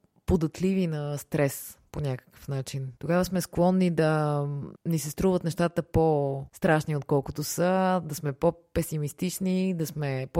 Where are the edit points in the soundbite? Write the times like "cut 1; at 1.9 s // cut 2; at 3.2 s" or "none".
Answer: cut 1; at 3.0 s